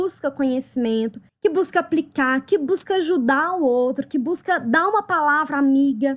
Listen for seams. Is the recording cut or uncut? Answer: uncut